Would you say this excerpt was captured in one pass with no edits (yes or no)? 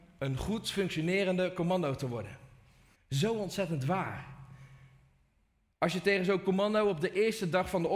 no